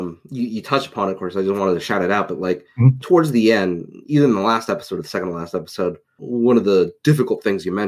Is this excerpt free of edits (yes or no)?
no